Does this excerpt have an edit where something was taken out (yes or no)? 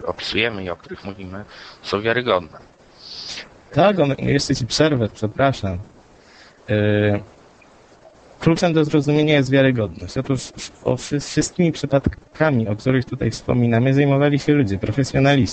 yes